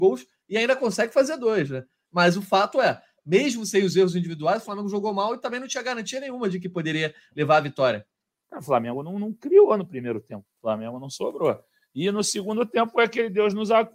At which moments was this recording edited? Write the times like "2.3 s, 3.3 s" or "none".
8.4 s, 10.5 s